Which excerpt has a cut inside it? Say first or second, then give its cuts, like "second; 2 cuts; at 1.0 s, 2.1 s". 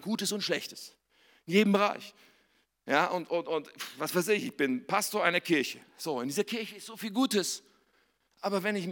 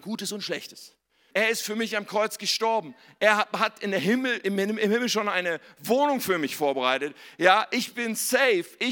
second; 1 cut; at 1.3 s